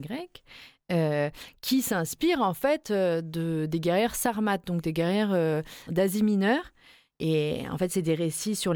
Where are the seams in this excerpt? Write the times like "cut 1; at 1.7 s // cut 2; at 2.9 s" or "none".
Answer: none